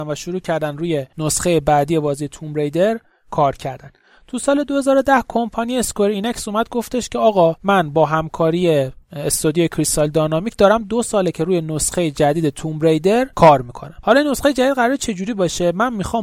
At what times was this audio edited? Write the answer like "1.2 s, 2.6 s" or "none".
none